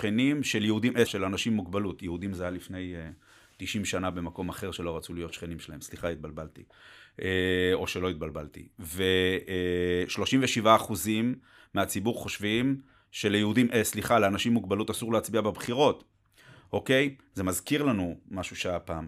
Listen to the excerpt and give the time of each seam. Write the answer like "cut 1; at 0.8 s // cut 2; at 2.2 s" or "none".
cut 1; at 1.1 s